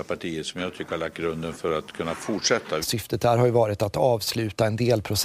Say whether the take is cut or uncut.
cut